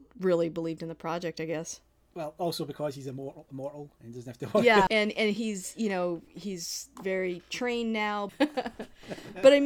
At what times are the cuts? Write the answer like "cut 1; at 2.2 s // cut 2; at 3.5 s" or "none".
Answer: cut 1; at 4.9 s // cut 2; at 8.3 s